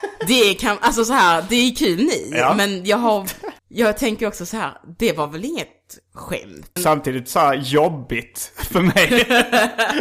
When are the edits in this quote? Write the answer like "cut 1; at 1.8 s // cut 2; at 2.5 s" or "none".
cut 1; at 3.6 s // cut 2; at 6.8 s

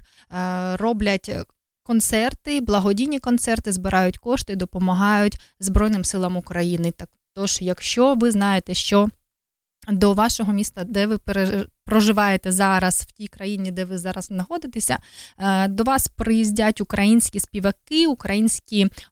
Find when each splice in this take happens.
none

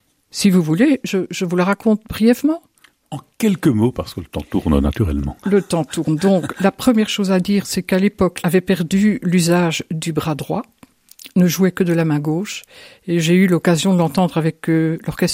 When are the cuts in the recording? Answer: cut 1; at 8.4 s

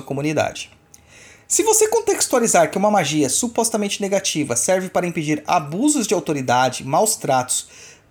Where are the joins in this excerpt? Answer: none

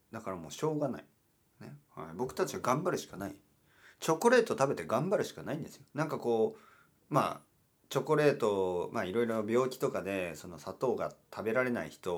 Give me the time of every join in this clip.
cut 1; at 1.8 s // cut 2; at 5.9 s

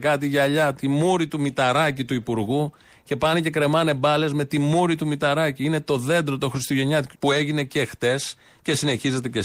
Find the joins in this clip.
cut 1; at 7.1 s

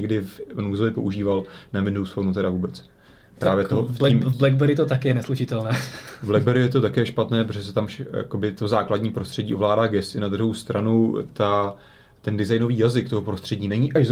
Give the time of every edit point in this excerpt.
cut 1; at 3.2 s

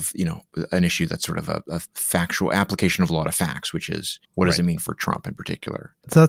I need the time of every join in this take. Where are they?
cut 1; at 4.2 s

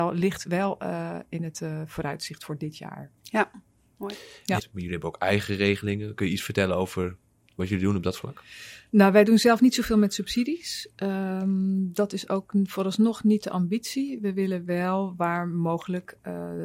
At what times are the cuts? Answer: cut 1; at 3.2 s // cut 2; at 4.6 s

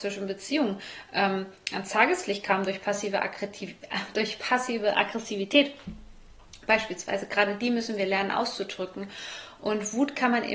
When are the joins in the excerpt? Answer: none

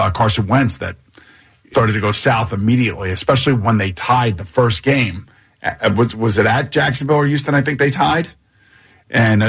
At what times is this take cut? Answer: cut 1; at 1.7 s

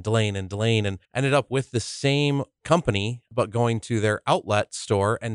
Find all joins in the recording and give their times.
cut 1; at 1.0 s

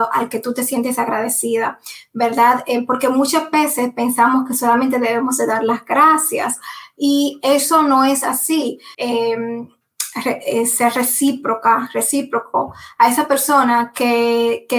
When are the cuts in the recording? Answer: cut 1; at 8.9 s

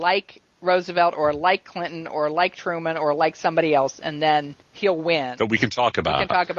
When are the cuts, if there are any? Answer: cut 1; at 4.6 s

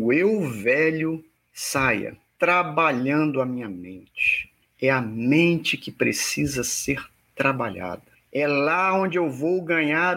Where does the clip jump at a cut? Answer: cut 1; at 2.3 s

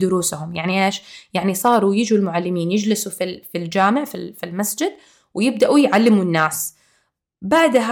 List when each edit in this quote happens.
none

